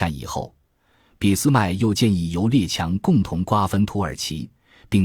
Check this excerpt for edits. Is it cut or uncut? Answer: uncut